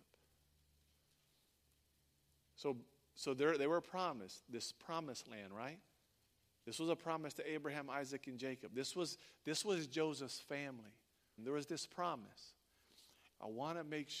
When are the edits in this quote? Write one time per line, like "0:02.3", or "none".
0:11.4
0:13.3